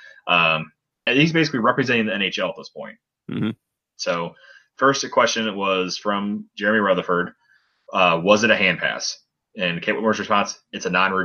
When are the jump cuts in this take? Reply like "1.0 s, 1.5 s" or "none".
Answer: 1.1 s

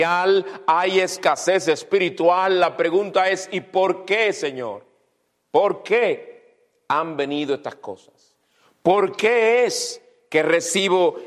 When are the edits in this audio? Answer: none

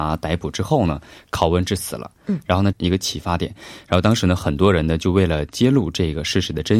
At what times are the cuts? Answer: 2.7 s

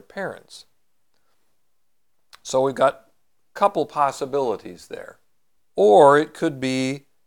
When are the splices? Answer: 5.6 s

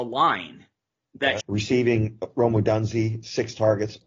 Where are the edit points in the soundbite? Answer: 1.4 s

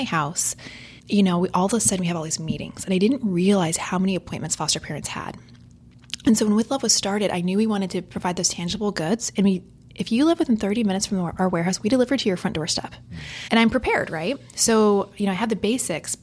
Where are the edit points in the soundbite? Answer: 1.0 s, 13.5 s

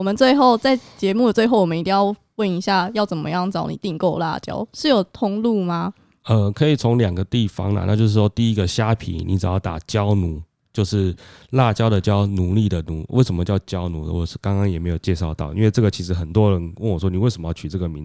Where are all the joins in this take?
none

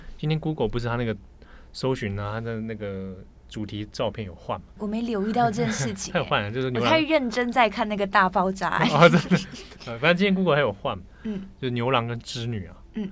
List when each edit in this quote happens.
none

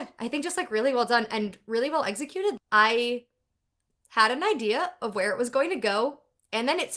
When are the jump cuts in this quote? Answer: 2.6 s

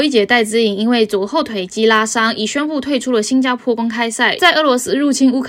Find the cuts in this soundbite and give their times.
4.4 s

